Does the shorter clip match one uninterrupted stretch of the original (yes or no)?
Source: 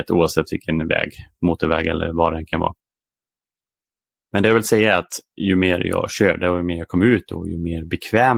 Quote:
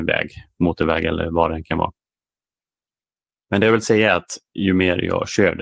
yes